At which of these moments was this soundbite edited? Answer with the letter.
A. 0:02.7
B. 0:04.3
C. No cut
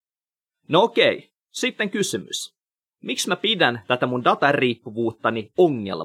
C